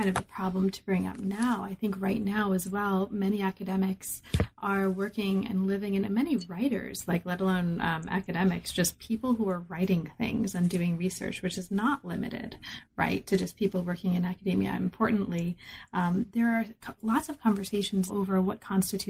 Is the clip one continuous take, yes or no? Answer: no